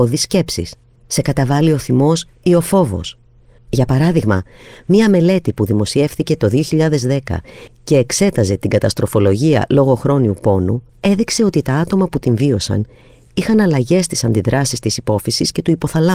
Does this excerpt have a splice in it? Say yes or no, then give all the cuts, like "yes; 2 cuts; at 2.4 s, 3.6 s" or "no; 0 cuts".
yes; 3 cuts; at 1.0 s, 3.6 s, 10.9 s